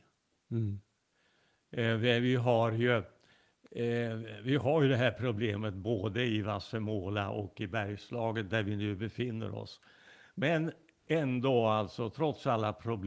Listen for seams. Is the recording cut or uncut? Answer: uncut